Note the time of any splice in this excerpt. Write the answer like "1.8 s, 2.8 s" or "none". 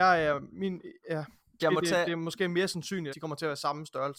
1.6 s, 3.1 s